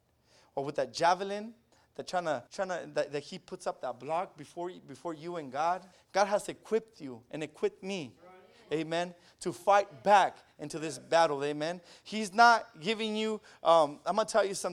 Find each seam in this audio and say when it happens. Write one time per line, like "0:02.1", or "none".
0:02.5
0:05.9